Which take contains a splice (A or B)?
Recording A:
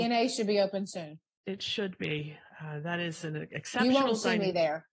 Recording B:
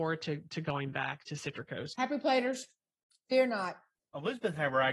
B